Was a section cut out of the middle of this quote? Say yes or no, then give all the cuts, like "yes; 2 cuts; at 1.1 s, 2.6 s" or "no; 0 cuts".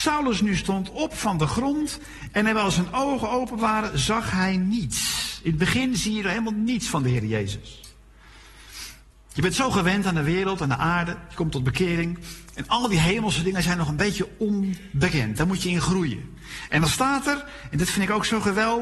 no; 0 cuts